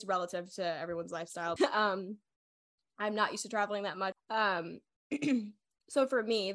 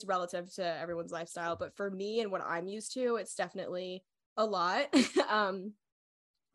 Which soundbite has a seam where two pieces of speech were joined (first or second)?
first